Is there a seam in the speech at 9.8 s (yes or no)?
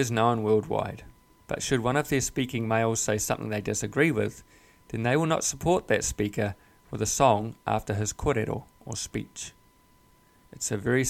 no